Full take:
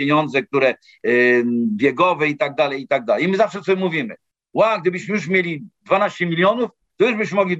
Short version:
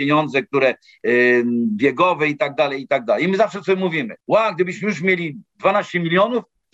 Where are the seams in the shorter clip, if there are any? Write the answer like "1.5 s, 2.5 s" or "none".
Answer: 4.2 s